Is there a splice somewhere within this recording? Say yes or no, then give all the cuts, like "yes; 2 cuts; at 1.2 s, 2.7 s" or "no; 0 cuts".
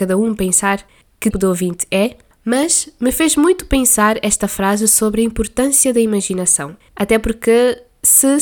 yes; 2 cuts; at 1.3 s, 6.9 s